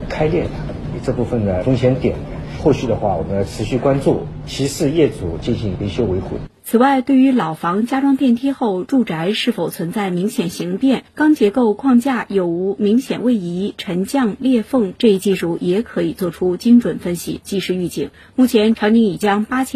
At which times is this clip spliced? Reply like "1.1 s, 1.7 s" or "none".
6.6 s, 14.9 s